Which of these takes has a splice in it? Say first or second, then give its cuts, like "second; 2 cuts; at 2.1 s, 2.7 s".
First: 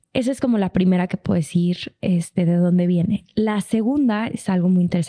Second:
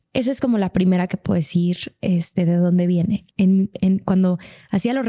second; 1 cut; at 3.3 s